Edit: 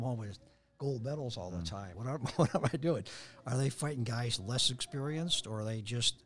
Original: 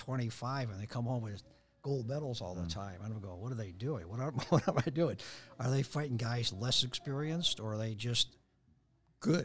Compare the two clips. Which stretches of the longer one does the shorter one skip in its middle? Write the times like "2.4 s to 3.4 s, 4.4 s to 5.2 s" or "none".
3.0 s to 4.1 s